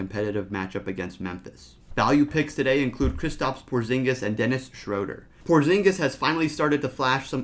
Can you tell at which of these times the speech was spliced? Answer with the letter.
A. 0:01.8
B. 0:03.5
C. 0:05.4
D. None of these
D